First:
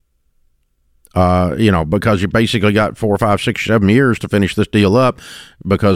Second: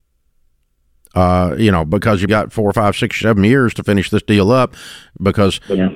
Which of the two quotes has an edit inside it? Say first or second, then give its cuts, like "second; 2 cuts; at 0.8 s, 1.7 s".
second; 1 cut; at 2.3 s